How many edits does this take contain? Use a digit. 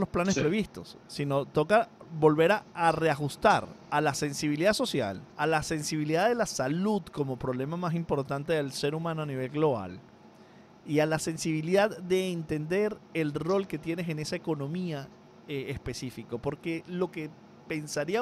1